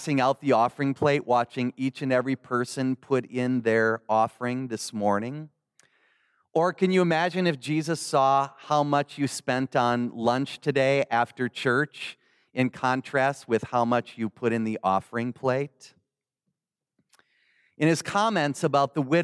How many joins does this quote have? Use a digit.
0